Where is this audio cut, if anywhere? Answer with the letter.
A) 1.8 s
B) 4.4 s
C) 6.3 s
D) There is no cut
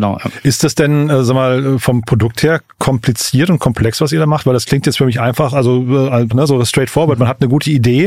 C